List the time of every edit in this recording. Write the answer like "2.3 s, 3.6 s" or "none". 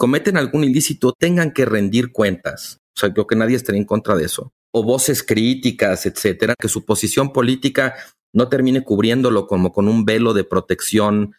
none